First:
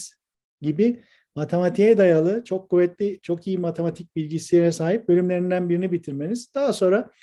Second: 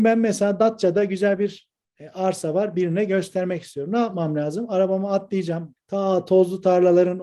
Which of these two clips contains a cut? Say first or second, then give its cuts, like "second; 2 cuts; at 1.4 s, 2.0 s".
second; 1 cut; at 5.8 s